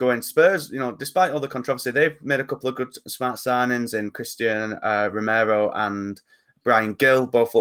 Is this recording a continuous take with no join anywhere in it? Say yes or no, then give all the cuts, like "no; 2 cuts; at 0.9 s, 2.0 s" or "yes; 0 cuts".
yes; 0 cuts